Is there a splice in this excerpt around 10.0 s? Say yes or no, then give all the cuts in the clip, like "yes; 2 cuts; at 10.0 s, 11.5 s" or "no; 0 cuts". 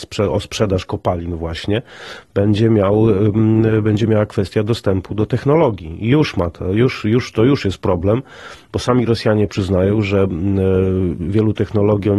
no; 0 cuts